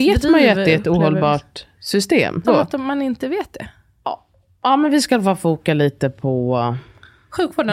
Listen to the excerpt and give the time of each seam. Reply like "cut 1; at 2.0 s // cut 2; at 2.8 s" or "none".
cut 1; at 2.4 s